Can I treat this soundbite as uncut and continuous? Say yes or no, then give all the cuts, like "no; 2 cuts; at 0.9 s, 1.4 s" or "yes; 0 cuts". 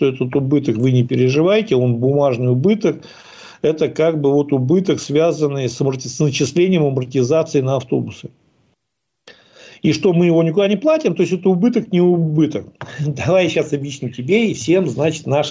yes; 0 cuts